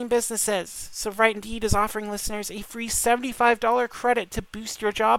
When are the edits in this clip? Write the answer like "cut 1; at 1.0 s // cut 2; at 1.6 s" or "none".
cut 1; at 1.3 s